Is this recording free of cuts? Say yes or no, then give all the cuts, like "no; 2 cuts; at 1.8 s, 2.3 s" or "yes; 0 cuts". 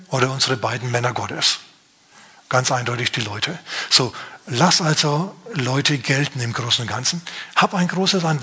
yes; 0 cuts